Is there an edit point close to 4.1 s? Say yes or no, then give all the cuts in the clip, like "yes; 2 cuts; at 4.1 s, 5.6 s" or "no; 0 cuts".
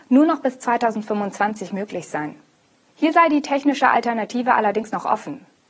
no; 1 cut; at 2.9 s